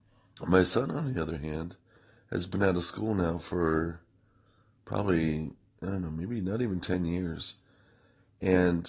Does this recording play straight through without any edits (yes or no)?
yes